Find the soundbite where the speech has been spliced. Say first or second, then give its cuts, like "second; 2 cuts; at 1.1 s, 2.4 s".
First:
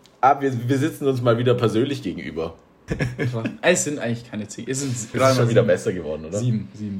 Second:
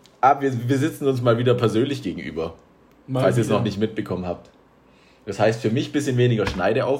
first; 2 cuts; at 2.9 s, 5.1 s